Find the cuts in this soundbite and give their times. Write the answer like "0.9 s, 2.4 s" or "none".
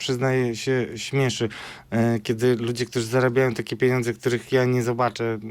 none